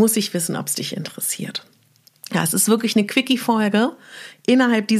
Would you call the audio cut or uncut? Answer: uncut